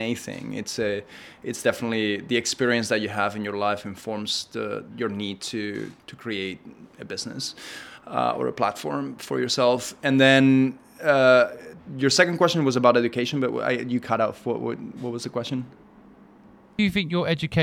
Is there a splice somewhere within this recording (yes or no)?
no